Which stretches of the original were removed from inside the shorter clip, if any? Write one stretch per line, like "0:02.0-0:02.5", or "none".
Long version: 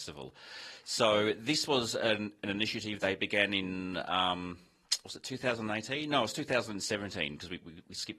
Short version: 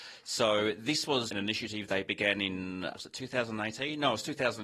0:01.9-0:02.4
0:04.0-0:05.0